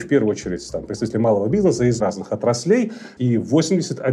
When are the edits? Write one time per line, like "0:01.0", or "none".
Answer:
0:02.0
0:03.2